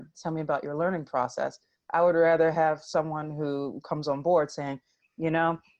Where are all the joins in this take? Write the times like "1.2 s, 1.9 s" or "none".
none